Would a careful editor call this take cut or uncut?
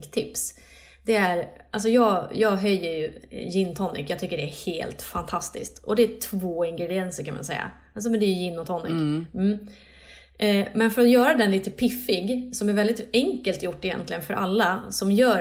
uncut